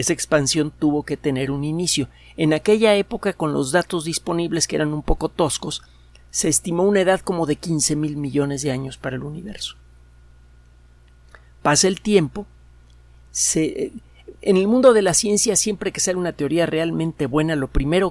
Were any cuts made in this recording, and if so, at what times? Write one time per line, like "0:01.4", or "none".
none